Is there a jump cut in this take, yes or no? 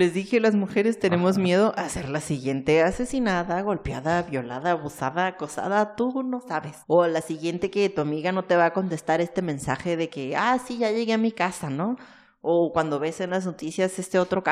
yes